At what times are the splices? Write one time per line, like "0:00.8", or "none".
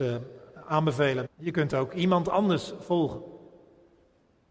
0:01.3